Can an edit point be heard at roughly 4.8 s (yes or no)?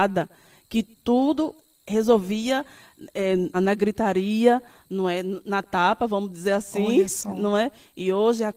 no